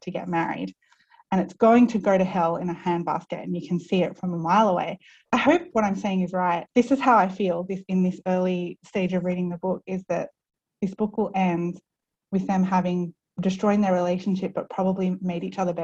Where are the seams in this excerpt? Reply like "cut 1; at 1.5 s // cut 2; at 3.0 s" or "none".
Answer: cut 1; at 5.2 s